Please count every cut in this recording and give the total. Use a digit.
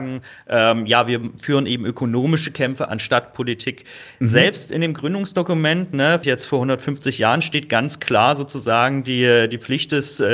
1